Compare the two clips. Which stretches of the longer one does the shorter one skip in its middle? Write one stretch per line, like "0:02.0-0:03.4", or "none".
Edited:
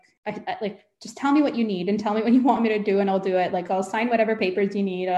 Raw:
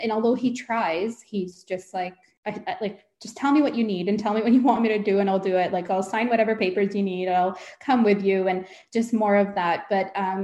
none